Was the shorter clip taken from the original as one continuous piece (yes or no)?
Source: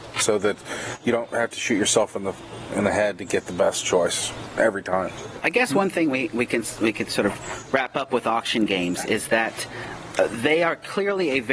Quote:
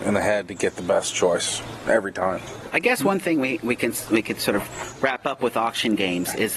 yes